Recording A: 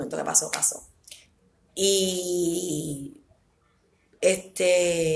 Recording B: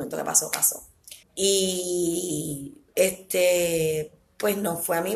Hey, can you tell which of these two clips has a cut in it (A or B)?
B